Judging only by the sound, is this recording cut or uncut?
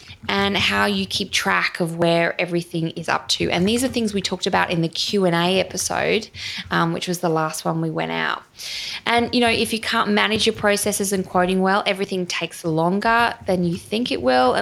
uncut